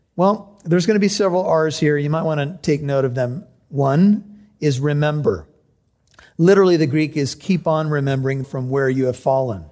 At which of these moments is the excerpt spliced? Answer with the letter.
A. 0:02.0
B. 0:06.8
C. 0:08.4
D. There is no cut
C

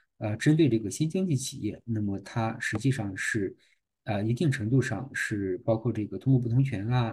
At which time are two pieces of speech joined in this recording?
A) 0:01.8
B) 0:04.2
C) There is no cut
C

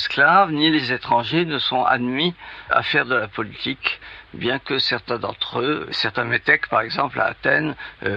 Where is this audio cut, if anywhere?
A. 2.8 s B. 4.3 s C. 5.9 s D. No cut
C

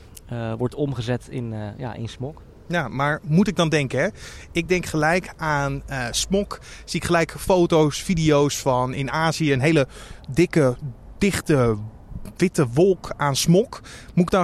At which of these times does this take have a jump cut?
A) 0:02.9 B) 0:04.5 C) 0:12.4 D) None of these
C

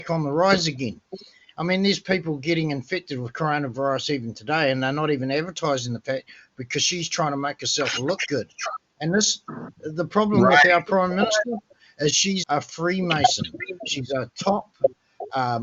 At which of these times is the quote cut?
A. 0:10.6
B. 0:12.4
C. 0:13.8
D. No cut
B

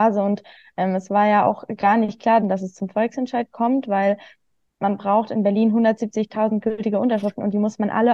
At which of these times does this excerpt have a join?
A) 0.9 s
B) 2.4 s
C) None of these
B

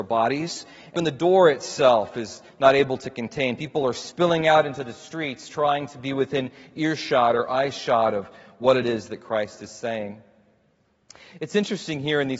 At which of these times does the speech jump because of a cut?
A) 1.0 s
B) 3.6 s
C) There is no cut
A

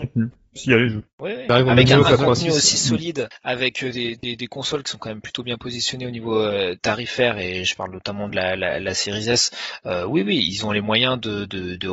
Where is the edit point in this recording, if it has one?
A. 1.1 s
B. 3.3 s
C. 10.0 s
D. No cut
A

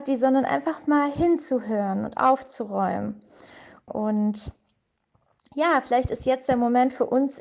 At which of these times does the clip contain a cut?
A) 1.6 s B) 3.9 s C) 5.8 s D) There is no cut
B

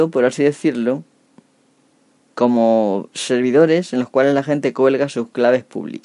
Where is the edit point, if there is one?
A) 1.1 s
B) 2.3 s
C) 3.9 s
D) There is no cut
B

